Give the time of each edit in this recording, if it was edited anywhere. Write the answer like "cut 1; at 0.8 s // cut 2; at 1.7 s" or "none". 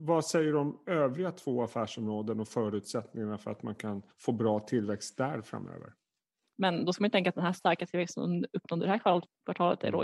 cut 1; at 4.1 s // cut 2; at 6.5 s